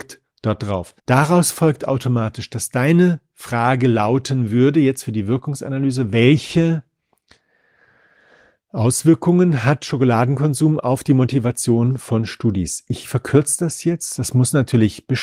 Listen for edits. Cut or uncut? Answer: cut